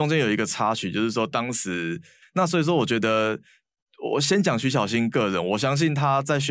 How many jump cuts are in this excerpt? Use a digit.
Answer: 1